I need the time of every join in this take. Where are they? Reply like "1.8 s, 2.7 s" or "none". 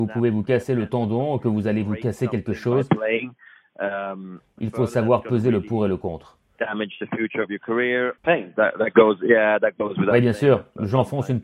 8.2 s